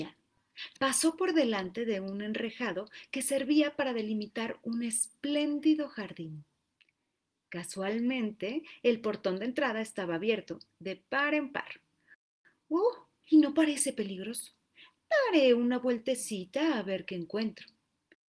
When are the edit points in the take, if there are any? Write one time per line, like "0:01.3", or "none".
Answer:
0:13.2